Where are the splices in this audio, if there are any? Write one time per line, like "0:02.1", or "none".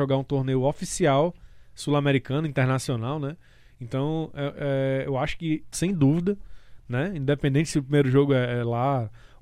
0:05.7